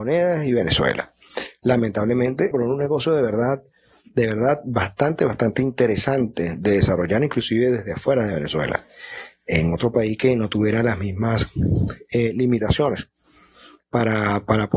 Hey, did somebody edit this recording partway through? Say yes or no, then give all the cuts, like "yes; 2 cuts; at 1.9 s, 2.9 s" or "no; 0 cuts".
yes; 1 cut; at 2.5 s